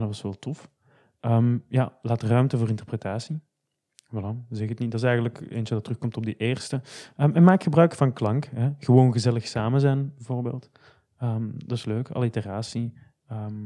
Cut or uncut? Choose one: uncut